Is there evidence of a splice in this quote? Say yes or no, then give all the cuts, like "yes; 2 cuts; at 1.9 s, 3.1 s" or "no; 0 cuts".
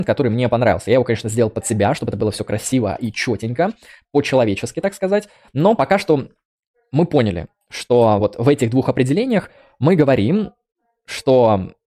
no; 0 cuts